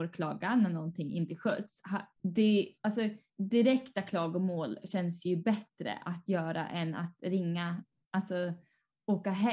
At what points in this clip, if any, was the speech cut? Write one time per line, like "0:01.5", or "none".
0:02.2
0:03.3